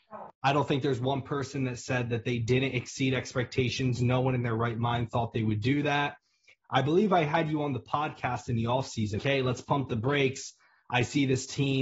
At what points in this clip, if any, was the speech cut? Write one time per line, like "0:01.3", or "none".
0:09.2